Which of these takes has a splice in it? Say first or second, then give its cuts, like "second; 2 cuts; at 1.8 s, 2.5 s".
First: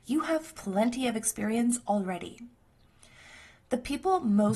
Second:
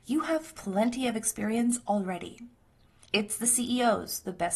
second; 1 cut; at 3.0 s